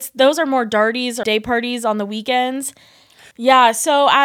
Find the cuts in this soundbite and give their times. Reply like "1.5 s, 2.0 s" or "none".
1.2 s, 3.3 s